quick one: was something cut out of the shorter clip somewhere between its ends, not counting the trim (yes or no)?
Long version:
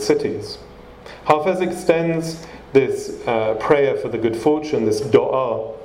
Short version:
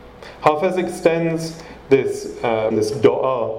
yes